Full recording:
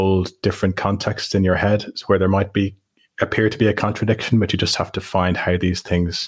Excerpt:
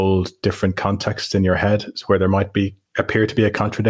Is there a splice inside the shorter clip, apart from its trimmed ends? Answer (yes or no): yes